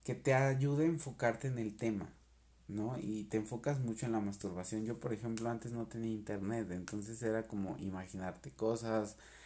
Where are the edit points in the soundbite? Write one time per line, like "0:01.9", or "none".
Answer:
none